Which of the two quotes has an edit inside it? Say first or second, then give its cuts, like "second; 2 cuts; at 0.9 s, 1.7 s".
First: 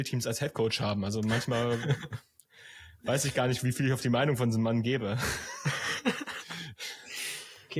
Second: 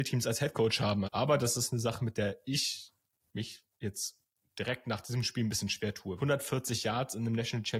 second; 2 cuts; at 1.0 s, 6.2 s